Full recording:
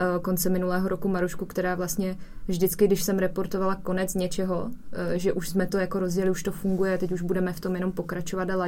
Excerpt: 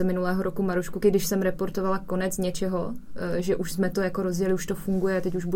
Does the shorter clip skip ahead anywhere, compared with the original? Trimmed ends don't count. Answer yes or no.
yes